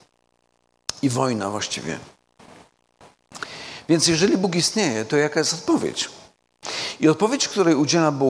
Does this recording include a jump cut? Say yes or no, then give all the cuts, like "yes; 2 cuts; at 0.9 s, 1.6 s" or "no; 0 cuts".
no; 0 cuts